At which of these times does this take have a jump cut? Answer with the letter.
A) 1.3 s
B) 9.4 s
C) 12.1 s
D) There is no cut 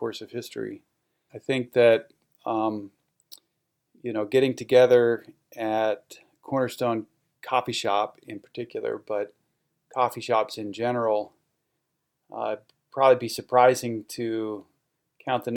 A